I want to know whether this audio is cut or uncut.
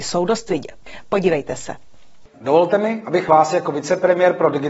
cut